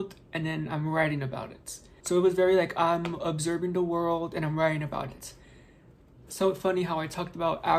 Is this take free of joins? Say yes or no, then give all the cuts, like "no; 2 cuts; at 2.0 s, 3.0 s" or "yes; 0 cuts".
no; 1 cut; at 2.0 s